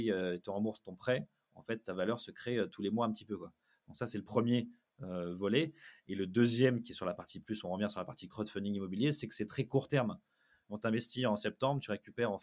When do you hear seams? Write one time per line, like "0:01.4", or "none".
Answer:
0:10.6